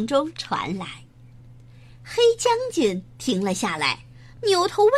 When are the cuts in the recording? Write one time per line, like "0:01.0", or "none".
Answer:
0:01.3